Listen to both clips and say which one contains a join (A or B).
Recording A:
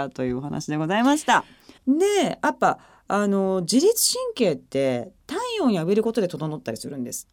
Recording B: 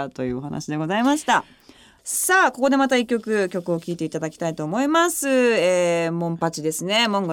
A